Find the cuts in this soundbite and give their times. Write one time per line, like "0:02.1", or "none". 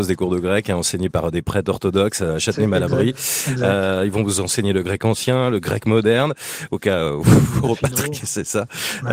none